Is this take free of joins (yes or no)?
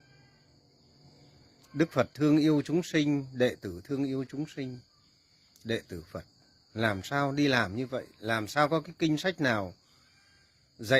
yes